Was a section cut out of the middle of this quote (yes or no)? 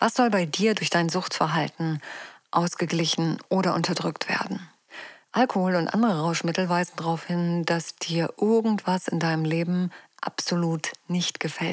no